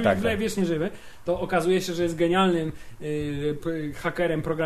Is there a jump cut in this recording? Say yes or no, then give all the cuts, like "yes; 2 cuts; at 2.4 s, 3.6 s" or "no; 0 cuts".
no; 0 cuts